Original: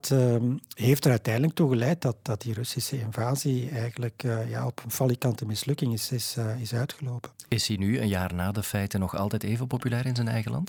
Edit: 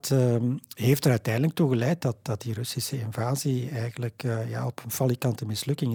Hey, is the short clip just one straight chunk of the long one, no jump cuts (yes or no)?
yes